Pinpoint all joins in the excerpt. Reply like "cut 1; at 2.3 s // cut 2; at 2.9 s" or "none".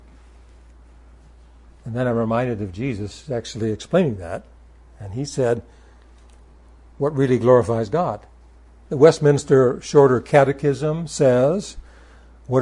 cut 1; at 8.9 s